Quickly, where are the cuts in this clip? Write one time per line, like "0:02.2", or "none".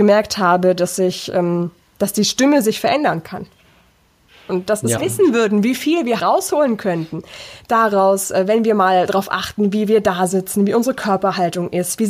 0:05.0
0:06.2